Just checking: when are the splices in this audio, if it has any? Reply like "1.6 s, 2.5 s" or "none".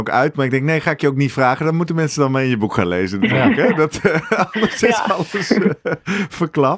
none